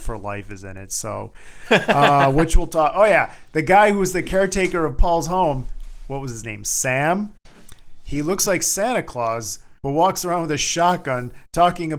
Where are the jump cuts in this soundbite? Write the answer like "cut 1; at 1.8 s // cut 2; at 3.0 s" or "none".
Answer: none